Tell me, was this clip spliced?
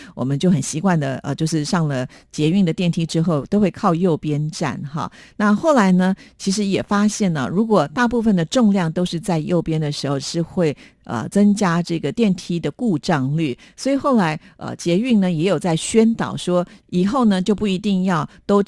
no; 0 cuts

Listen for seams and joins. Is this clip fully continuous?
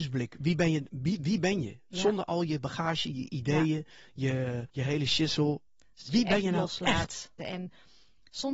no; 2 cuts; at 4.7 s, 7.4 s

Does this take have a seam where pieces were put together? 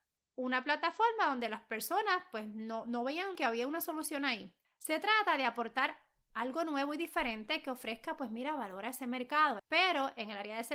yes; 2 cuts; at 4.6 s, 9.6 s

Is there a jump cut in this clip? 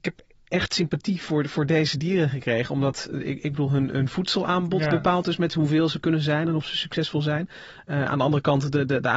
no; 0 cuts

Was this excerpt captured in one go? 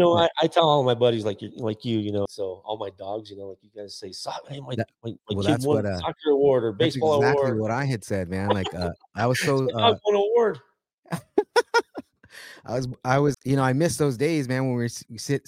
no; 2 cuts; at 2.3 s, 13.3 s

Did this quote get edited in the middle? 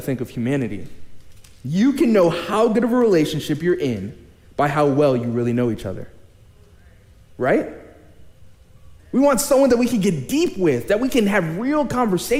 yes; 1 cut; at 9.0 s

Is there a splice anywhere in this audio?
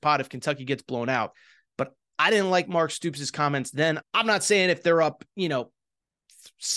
yes; 1 cut; at 4.0 s

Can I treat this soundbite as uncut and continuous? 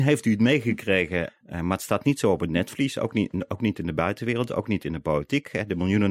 no; 1 cut; at 1.3 s

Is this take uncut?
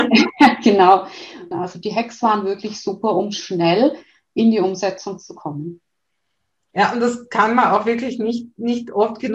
no; 1 cut; at 1.5 s

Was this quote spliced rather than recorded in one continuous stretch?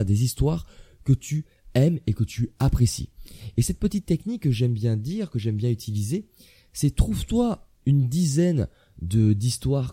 no; 0 cuts

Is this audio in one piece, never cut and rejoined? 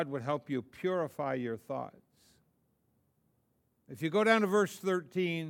no; 1 cut; at 3.9 s

